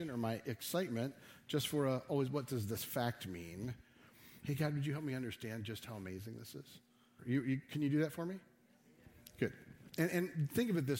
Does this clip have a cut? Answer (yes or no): yes